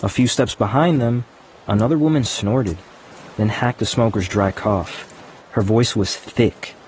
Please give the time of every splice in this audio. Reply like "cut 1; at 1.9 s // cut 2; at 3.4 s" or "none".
cut 1; at 5.4 s